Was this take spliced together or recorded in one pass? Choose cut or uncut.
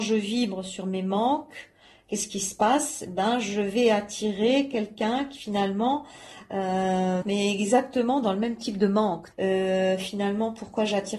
cut